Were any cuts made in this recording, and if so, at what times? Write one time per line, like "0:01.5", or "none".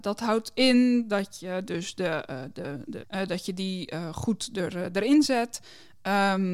0:03.0